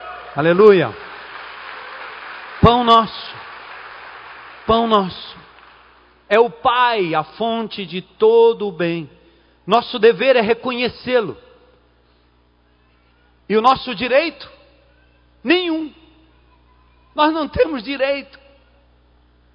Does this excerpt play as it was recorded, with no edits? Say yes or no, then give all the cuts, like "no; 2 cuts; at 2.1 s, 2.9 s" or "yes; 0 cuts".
yes; 0 cuts